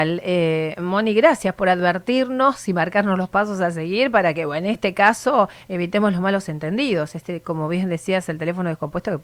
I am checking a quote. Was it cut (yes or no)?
no